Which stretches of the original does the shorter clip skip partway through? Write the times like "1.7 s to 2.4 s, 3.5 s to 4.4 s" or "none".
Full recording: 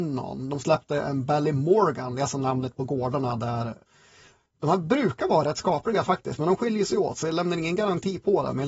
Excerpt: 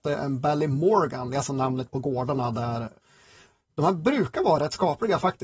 none